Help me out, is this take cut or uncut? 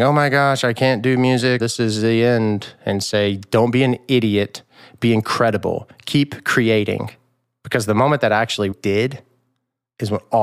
cut